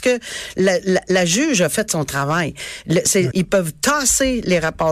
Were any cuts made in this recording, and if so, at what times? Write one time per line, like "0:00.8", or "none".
0:03.3